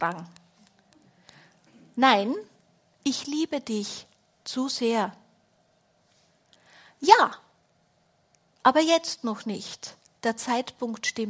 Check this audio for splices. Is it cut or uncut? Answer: uncut